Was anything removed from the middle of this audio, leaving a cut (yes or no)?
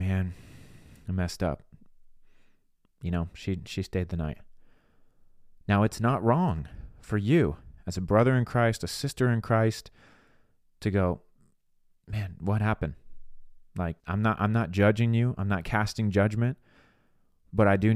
yes